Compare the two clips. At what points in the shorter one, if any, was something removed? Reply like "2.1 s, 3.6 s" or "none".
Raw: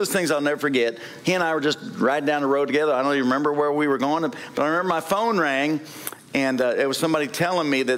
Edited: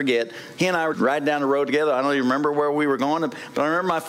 0.9 s